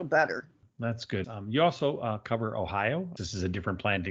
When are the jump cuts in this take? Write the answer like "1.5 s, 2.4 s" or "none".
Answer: 1.2 s, 3.2 s